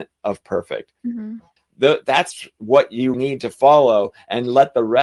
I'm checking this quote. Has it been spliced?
yes; 2 cuts; at 1.6 s, 3.1 s

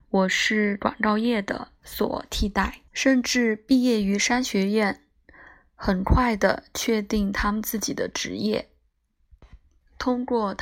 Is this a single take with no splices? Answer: no; 1 cut; at 2.9 s

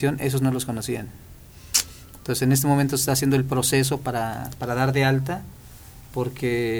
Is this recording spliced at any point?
no; 0 cuts

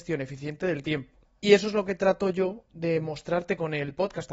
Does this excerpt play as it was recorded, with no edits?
yes; 0 cuts

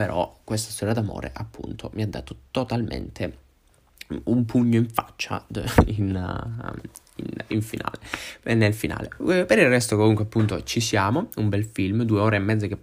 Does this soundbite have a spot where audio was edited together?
no; 0 cuts

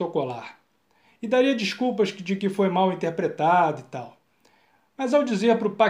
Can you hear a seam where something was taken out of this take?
no; 0 cuts

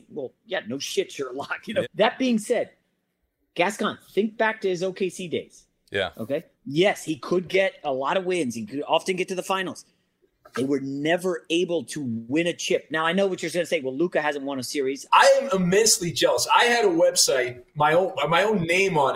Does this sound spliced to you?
yes; 2 cuts; at 1.8 s, 15.1 s

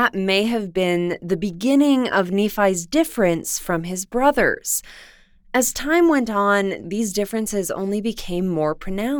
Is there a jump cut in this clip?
yes; 1 cut; at 6.8 s

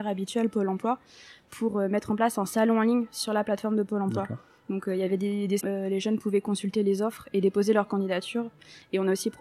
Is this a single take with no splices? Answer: no; 1 cut; at 5.6 s

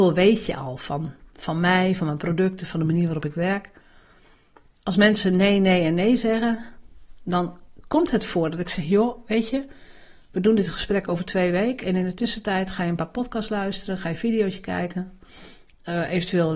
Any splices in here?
no; 0 cuts

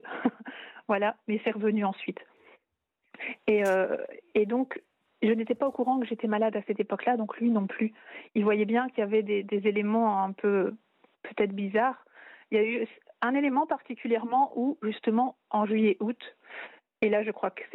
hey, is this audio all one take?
yes; 0 cuts

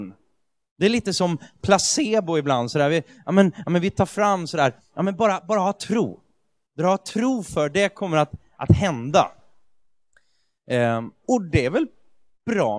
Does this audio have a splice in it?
no; 0 cuts

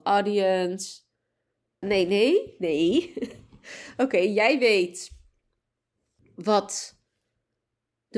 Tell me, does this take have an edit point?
yes; 1 cut; at 1.8 s

